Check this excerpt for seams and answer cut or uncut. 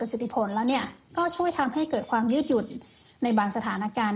uncut